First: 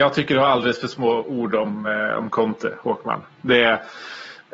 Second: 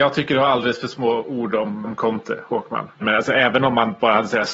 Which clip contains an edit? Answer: second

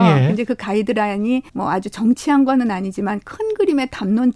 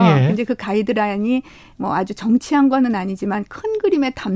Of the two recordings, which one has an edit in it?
first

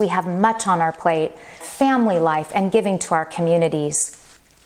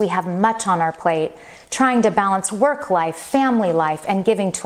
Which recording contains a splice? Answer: first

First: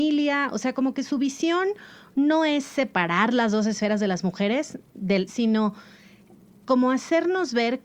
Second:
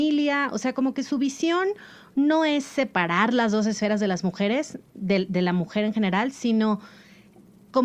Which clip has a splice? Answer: first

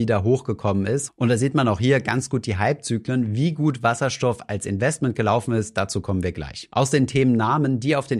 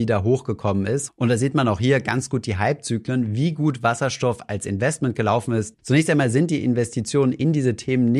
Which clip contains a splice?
second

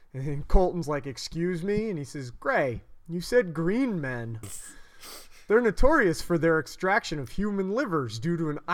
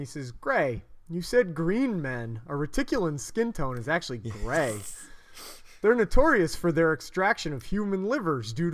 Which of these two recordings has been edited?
first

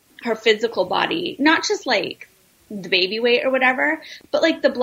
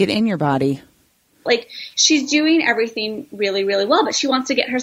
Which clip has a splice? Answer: second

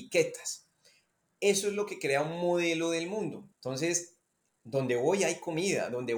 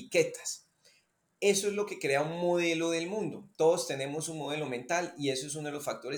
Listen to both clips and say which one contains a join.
first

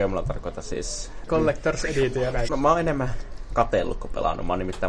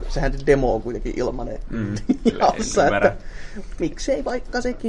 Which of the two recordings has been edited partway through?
first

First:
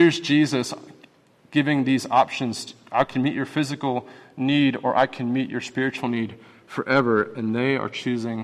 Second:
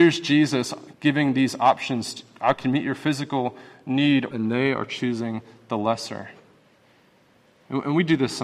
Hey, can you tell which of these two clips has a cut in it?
second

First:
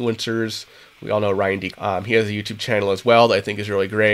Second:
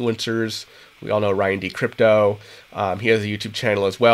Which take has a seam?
first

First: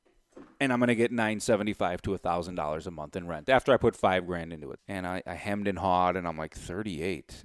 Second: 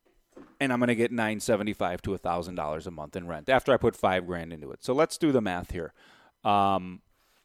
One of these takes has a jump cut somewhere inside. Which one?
first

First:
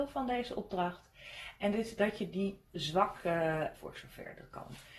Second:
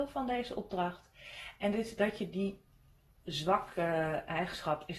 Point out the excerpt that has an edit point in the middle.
first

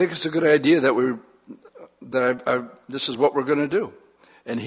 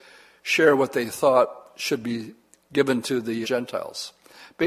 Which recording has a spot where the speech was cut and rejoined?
second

